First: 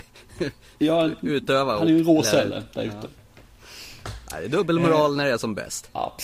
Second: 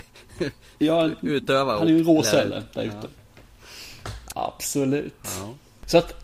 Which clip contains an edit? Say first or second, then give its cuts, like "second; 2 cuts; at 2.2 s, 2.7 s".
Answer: second; 1 cut; at 4.3 s